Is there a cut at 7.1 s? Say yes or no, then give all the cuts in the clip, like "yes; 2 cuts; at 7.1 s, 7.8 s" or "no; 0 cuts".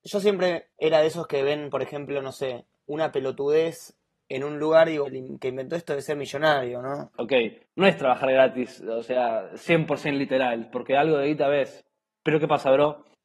yes; 2 cuts; at 5.0 s, 7.1 s